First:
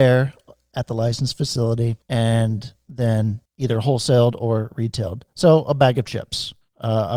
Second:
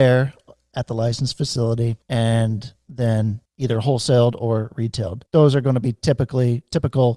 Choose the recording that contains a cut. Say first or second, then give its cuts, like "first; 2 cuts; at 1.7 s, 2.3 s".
second; 1 cut; at 5.3 s